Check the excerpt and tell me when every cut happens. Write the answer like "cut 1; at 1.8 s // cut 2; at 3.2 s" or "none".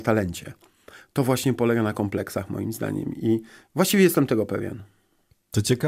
none

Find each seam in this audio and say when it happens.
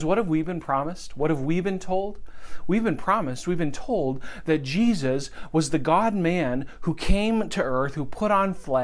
none

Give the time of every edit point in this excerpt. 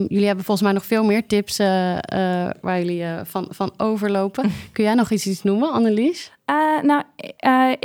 none

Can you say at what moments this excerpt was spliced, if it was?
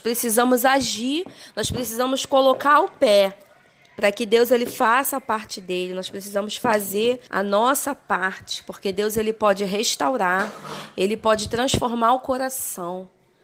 none

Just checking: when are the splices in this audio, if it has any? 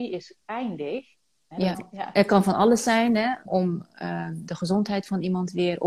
cut 1; at 1.7 s // cut 2; at 3.5 s

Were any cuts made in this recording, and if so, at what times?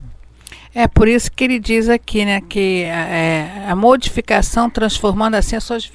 none

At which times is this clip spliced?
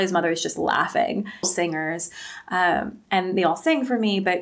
cut 1; at 1.4 s

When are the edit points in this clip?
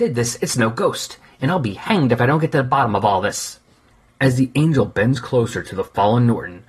none

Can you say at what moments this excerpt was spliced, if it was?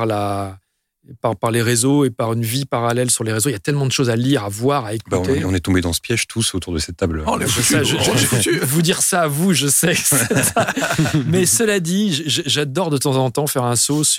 cut 1; at 1.2 s

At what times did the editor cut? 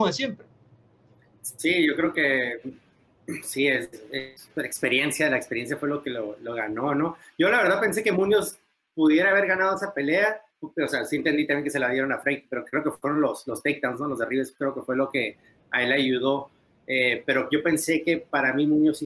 cut 1; at 10.5 s

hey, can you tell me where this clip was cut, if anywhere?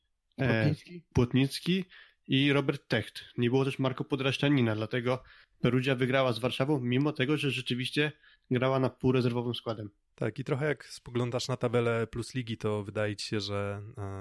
none

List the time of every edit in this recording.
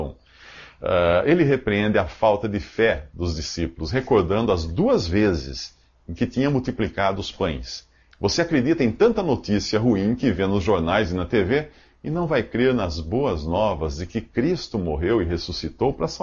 cut 1; at 8.1 s

